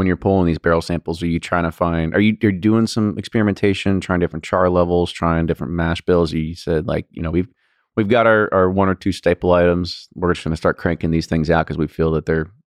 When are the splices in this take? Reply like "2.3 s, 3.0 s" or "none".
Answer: none